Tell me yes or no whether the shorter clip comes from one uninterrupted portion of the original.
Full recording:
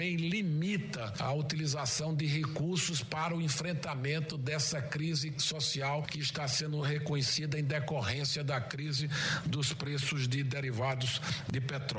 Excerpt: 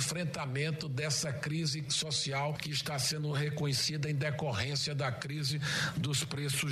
yes